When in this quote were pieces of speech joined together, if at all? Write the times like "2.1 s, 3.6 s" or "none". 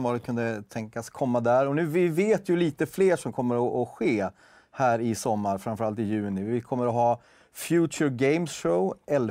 none

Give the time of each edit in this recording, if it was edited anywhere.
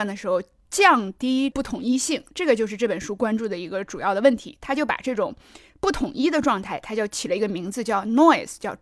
none

